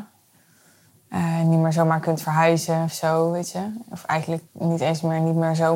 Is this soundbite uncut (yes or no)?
yes